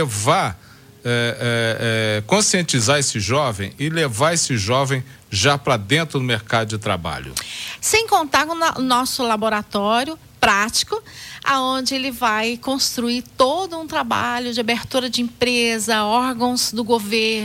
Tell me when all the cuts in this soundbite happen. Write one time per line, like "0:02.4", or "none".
0:07.8

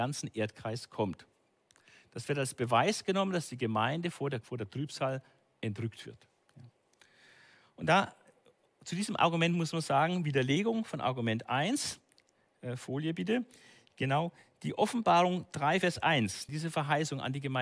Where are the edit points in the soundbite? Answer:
0:04.4
0:16.5

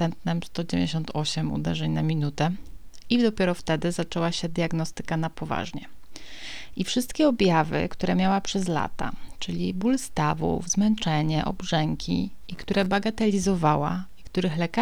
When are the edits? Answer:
none

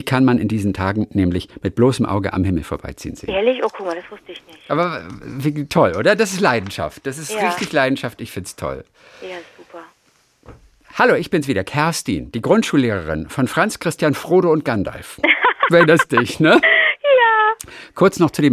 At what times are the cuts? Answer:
none

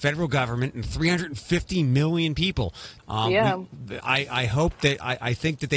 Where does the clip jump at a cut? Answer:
0:03.0

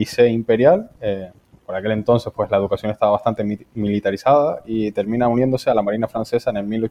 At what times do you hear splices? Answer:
none

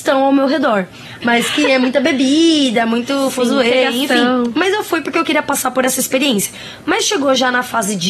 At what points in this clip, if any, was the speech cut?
0:01.2

